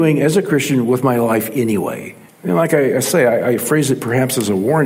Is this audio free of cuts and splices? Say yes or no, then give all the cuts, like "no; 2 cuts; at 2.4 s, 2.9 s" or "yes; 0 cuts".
no; 1 cut; at 2.3 s